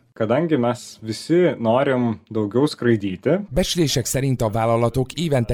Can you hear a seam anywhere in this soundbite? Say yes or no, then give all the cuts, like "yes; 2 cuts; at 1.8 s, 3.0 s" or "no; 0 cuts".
yes; 1 cut; at 3.5 s